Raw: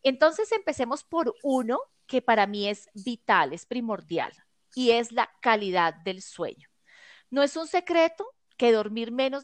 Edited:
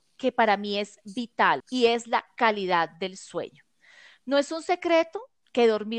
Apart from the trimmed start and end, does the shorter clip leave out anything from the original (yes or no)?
yes